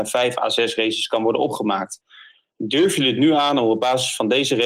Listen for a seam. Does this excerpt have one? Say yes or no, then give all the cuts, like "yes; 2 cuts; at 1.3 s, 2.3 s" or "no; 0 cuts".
no; 0 cuts